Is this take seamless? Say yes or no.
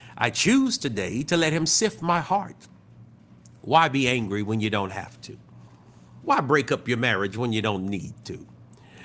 yes